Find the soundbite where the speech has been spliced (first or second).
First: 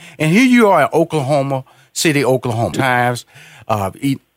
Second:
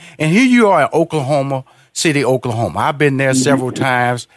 first